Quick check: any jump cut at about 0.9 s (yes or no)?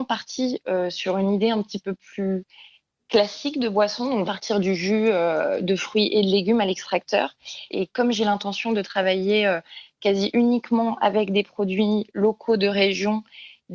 no